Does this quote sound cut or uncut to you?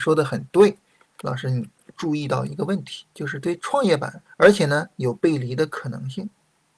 cut